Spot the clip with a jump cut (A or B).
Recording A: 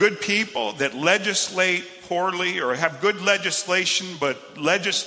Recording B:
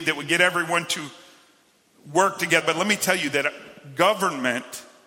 B